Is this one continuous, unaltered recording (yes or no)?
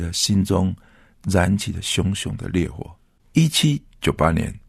no